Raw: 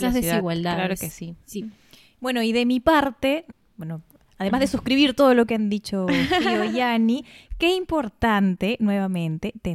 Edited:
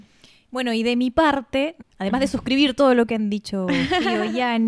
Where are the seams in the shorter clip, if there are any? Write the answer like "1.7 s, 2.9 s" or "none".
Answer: 1.9 s

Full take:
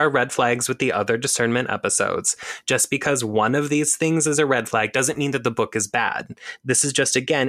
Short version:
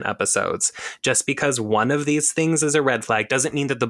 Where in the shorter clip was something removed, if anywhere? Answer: none

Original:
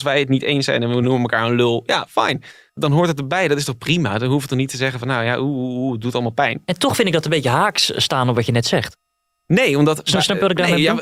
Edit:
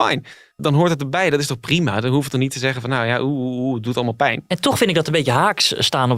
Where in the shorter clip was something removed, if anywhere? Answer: none

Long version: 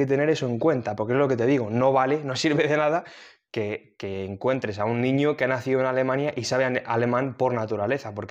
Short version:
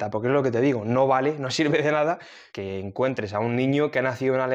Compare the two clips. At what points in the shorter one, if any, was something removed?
2.5 s

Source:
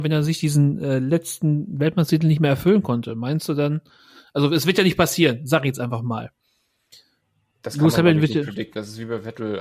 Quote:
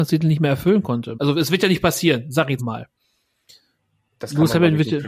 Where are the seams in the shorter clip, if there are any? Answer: 1.1 s, 2.6 s

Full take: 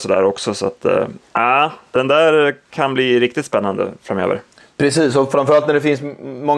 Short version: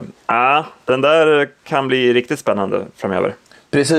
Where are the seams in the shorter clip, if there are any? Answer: none

